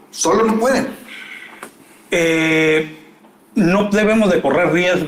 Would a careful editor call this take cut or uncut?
uncut